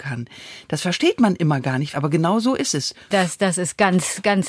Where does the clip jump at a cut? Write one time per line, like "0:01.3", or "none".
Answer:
0:01.9
0:03.1